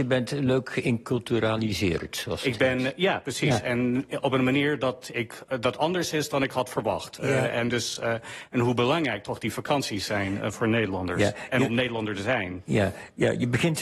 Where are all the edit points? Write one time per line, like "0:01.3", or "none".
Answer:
none